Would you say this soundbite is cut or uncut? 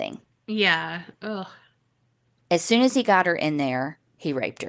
uncut